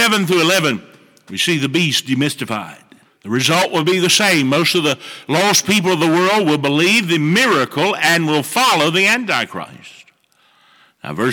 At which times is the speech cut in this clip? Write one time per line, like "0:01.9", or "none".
0:03.0